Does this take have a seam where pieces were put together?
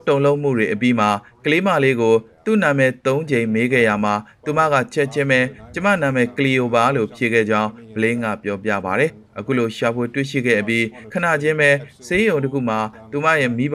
no; 0 cuts

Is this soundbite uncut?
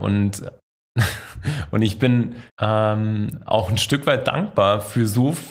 no; 1 cut; at 2.5 s

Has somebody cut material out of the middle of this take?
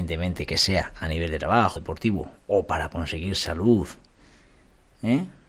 yes; 1 cut; at 1.8 s

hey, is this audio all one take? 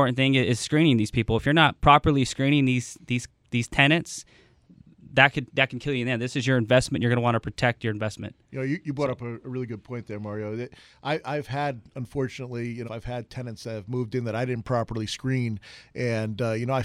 no; 1 cut; at 12.8 s

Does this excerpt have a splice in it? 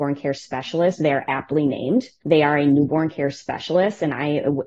no; 0 cuts

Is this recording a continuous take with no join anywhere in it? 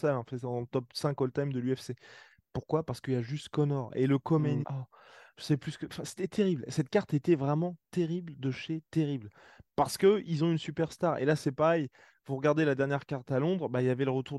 no; 1 cut; at 4.6 s

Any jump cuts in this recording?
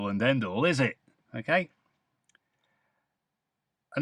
yes; 1 cut; at 1.2 s

